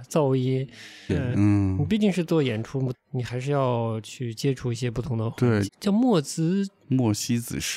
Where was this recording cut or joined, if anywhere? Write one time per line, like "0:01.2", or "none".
0:01.1
0:02.9
0:05.7